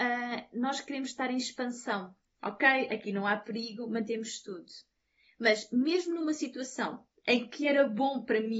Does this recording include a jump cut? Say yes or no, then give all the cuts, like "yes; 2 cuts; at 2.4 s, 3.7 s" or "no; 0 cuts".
yes; 1 cut; at 2.4 s